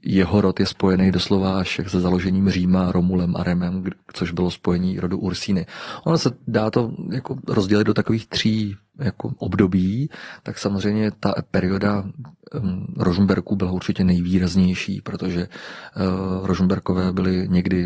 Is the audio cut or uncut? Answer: cut